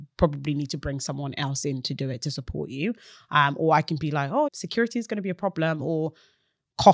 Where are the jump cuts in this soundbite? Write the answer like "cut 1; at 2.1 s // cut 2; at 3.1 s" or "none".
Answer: cut 1; at 4.5 s